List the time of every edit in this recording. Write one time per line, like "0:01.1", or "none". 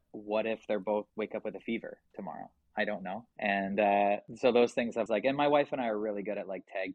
0:01.1
0:05.1